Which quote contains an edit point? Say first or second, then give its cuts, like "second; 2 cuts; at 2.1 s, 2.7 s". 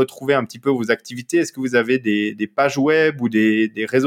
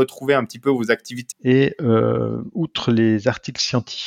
second; 1 cut; at 1.3 s